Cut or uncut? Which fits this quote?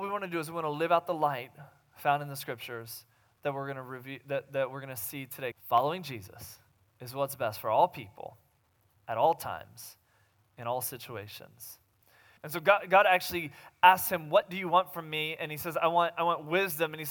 cut